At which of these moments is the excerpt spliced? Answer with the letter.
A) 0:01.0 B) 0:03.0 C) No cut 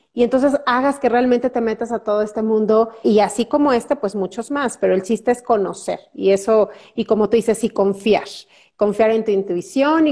B